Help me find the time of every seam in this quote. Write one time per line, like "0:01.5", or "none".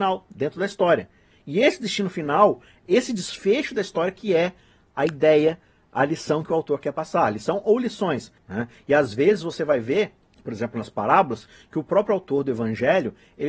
0:08.4